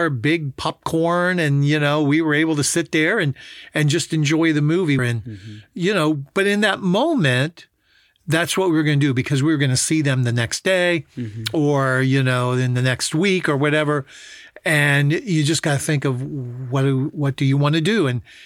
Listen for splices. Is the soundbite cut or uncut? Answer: cut